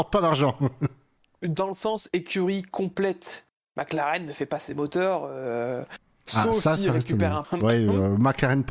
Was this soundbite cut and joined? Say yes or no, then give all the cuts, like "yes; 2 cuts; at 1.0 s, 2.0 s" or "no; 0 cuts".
yes; 1 cut; at 7.4 s